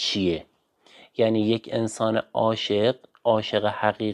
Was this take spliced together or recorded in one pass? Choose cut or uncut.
uncut